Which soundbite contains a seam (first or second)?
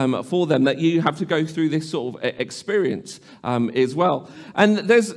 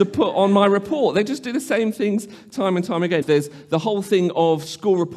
second